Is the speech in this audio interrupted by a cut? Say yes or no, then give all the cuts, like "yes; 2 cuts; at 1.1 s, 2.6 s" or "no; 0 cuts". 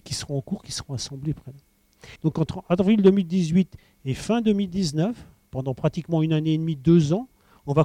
yes; 1 cut; at 2.2 s